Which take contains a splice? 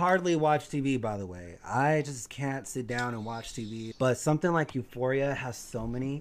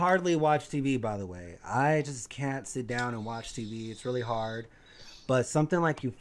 first; 1 cut; at 3.9 s

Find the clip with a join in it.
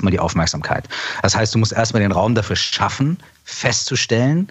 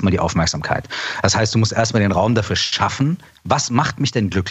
second; 1 cut; at 3.4 s

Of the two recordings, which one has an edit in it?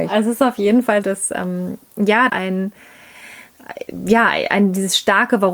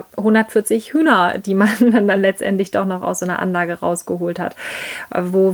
first; 2 cuts; at 1.0 s, 2.3 s

